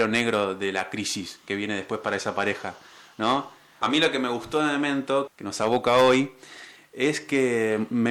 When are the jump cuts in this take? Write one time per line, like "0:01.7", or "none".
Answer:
0:03.8
0:05.3